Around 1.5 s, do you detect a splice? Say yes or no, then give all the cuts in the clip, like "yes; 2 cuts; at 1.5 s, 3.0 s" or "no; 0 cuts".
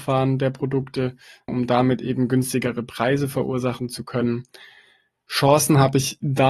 yes; 1 cut; at 1.5 s